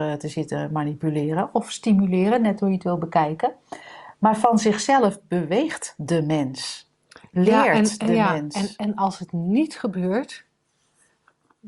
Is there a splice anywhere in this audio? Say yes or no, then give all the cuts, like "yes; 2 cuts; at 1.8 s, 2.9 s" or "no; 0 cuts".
no; 0 cuts